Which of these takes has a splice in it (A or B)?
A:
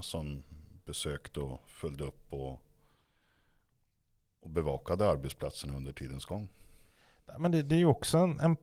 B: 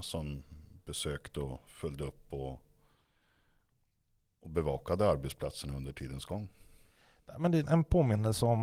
B